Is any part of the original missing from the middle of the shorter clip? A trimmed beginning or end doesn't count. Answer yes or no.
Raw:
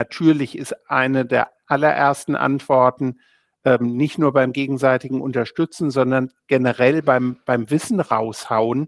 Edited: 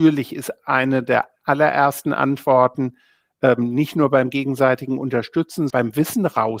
yes